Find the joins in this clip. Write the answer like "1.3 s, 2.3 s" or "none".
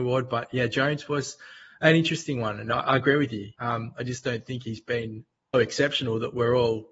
3.5 s, 5.5 s